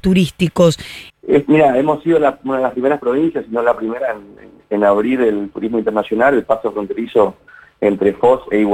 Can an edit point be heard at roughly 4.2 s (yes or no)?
no